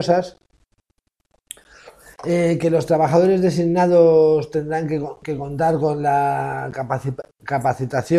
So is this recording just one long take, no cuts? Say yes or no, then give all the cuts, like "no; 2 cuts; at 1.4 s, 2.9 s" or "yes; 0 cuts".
no; 1 cut; at 5.2 s